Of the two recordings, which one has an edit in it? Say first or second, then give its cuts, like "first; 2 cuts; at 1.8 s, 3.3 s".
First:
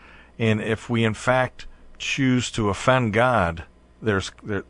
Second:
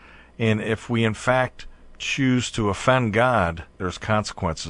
second; 1 cut; at 3.7 s